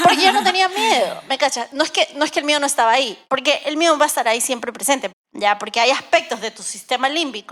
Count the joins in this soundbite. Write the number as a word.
two